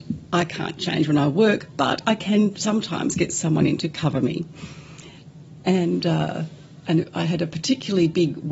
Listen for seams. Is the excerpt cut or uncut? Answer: uncut